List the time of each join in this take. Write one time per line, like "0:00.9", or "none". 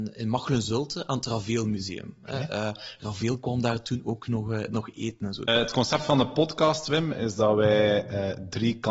0:05.5